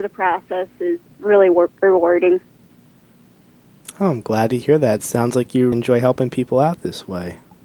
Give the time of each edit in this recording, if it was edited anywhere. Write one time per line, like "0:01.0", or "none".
0:05.7